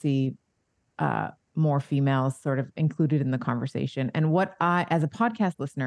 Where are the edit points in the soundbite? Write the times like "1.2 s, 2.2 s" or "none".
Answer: none